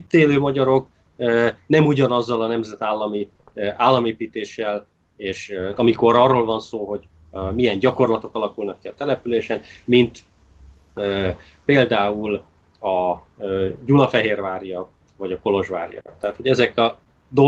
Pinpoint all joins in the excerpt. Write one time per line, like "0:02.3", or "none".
0:05.8